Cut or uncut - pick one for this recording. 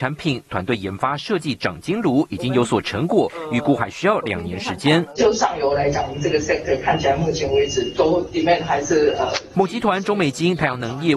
cut